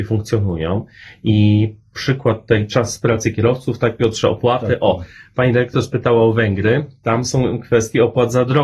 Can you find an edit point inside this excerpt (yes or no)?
no